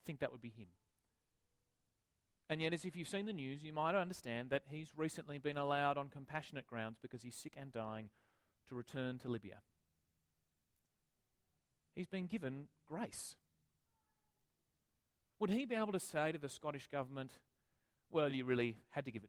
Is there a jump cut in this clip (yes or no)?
no